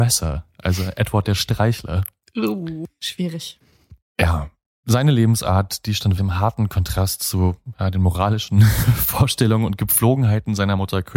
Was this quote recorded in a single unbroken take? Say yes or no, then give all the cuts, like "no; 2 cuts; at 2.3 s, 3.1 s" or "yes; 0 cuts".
no; 1 cut; at 6.2 s